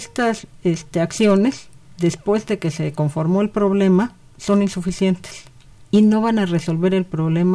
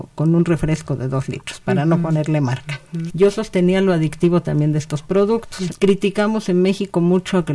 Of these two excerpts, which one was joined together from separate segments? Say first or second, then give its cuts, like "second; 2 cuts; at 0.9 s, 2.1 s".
second; 2 cuts; at 3.1 s, 5.7 s